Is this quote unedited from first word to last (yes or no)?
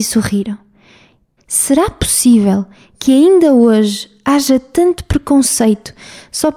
no